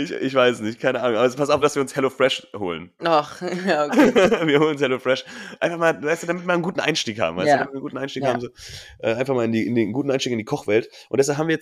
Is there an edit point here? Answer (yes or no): yes